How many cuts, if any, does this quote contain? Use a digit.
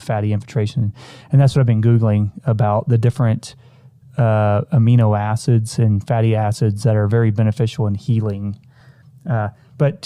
0